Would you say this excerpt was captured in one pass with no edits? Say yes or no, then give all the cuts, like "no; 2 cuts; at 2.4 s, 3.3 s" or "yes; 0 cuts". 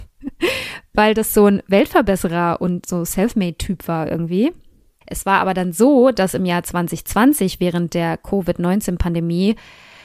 no; 1 cut; at 5.0 s